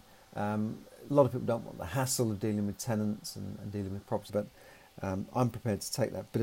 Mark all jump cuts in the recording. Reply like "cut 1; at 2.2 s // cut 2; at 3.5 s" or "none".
cut 1; at 4.3 s